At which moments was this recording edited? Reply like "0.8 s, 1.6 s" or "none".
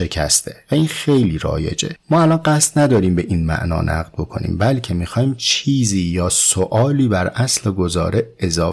2.0 s